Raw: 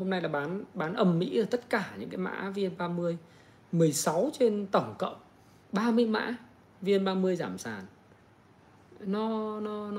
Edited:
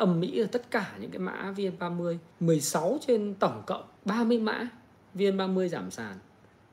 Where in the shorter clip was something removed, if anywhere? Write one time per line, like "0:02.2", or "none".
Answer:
0:02.3
0:04.0